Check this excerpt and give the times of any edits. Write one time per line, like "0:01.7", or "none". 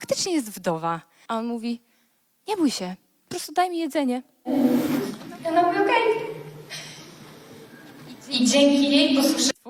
0:01.2